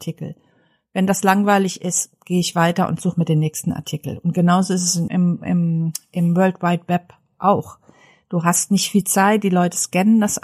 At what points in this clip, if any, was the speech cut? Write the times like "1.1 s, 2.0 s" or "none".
5.1 s